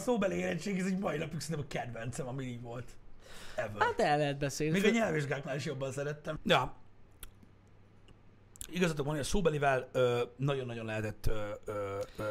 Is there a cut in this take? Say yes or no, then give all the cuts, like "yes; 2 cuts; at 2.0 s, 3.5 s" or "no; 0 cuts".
yes; 2 cuts; at 6.4 s, 8.7 s